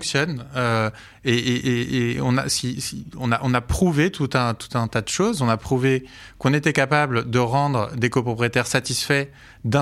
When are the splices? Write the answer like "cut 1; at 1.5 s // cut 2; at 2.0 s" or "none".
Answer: none